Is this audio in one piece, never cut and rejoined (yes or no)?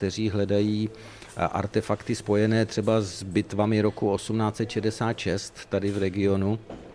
yes